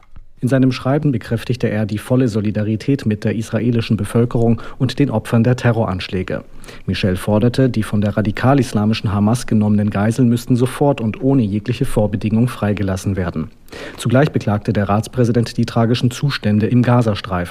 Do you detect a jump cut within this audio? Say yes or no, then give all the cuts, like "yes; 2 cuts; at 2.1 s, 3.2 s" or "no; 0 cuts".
no; 0 cuts